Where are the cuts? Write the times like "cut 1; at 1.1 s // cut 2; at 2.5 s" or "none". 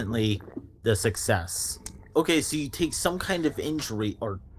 cut 1; at 2.1 s